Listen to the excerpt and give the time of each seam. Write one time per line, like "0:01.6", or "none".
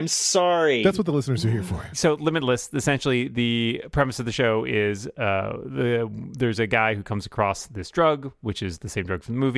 none